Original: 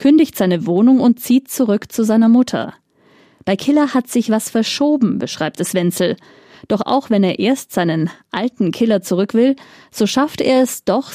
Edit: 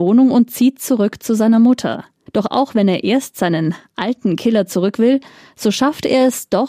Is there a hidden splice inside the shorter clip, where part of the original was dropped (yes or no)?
yes